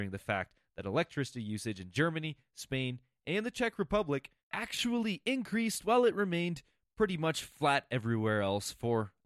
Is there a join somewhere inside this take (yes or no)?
no